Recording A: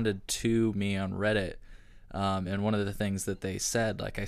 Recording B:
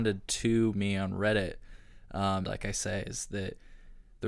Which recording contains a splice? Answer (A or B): B